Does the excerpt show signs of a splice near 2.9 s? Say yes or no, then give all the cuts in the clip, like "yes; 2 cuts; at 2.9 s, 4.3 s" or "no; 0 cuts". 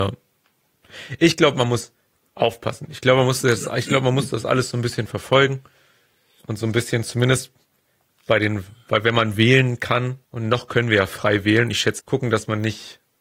no; 2 cuts; at 10.2 s, 12.0 s